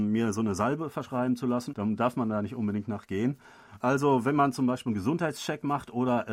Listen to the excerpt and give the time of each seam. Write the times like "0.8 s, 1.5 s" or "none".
1.7 s, 3.8 s